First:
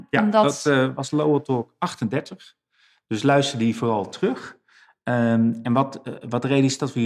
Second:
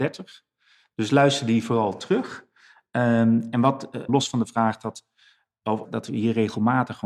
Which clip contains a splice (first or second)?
second